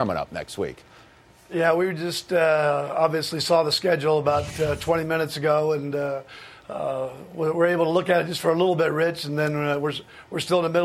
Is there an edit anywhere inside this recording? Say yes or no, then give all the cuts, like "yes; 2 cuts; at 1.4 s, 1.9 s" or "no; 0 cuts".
no; 0 cuts